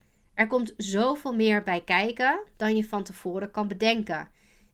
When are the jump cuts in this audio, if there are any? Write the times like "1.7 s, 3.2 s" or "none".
none